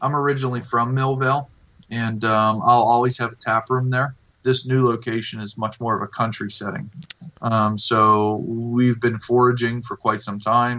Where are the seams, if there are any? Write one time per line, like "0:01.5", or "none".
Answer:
0:04.3

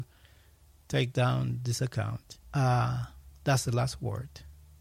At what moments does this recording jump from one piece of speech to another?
0:02.4

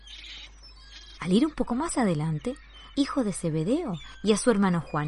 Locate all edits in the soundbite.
0:01.2
0:02.9

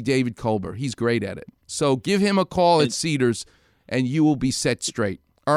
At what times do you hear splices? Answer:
none

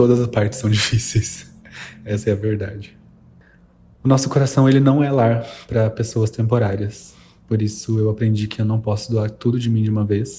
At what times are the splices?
none

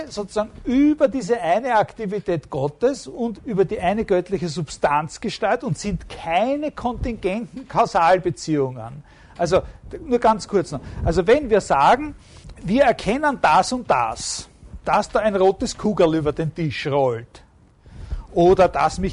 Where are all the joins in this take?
0:03.4

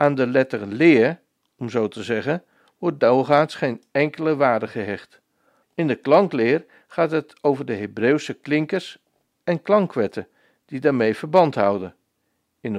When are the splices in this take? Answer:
0:05.6

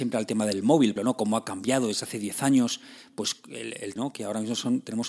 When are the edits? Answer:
0:01.0
0:04.0

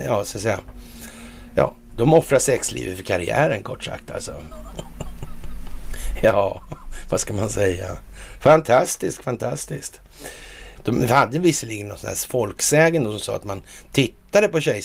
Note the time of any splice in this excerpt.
0:04.5
0:10.8

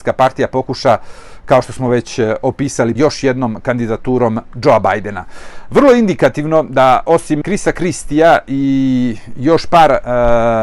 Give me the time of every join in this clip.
0:03.0
0:07.4

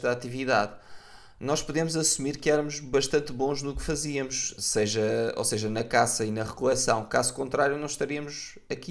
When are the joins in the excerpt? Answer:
none

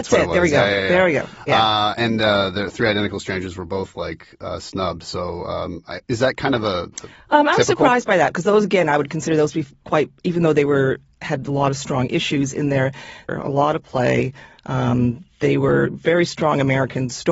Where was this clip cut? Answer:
0:06.9
0:13.3

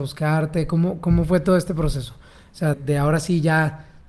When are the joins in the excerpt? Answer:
0:02.7

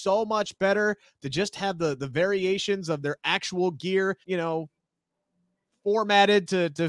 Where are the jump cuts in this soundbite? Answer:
0:03.0
0:04.2

